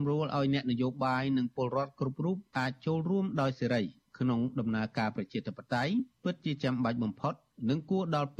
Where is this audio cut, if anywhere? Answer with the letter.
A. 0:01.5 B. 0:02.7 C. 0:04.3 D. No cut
D